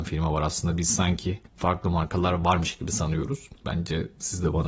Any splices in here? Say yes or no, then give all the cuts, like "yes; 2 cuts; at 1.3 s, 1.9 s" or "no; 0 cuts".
yes; 2 cuts; at 1.5 s, 3.6 s